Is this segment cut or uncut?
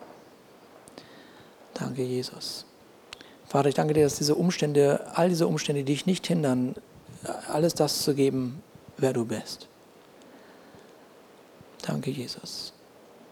uncut